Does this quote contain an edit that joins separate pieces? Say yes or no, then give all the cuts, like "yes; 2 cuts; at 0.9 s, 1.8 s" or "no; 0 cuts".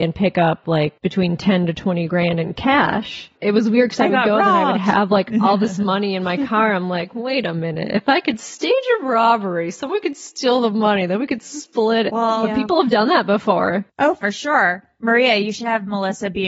yes; 1 cut; at 12.1 s